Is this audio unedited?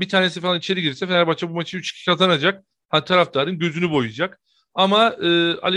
yes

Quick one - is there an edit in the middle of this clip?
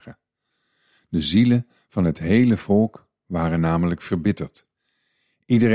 no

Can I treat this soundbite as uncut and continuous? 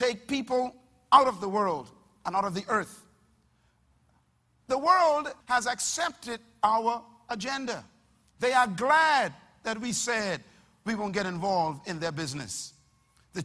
no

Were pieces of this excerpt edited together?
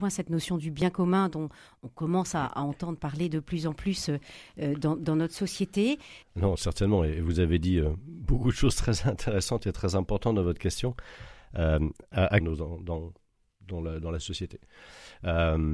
yes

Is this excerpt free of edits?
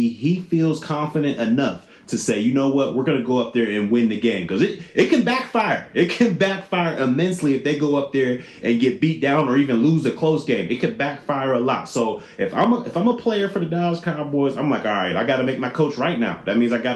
yes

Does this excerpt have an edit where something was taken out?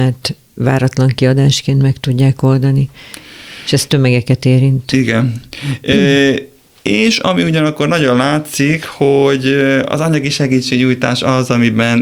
no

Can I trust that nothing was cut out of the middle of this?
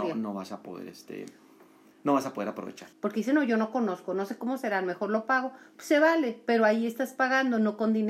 no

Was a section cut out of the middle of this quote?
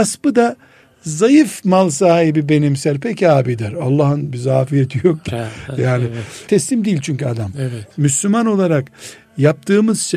yes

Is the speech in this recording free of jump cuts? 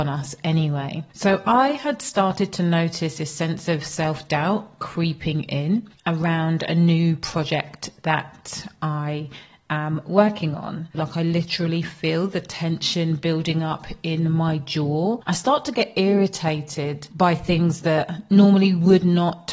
no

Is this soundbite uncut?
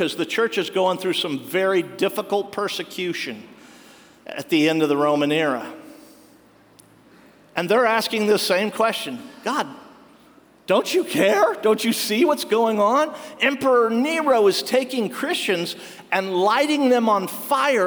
yes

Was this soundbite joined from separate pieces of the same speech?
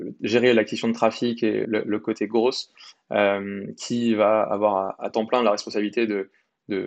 yes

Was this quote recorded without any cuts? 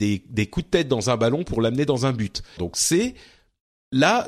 no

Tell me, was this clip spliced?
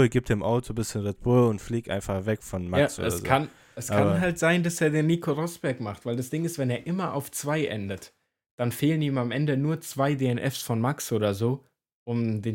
no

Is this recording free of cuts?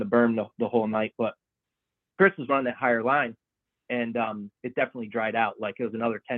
no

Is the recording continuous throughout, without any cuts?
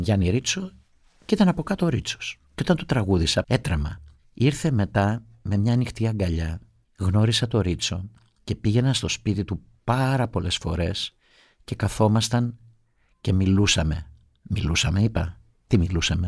no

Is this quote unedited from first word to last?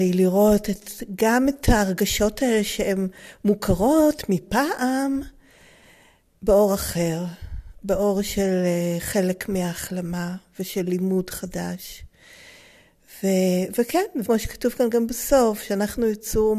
no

